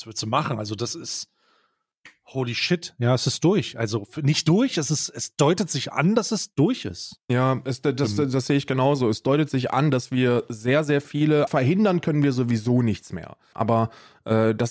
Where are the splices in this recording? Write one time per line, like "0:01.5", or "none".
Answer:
0:11.5
0:13.5